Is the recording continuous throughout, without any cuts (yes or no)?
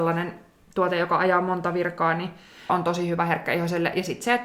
no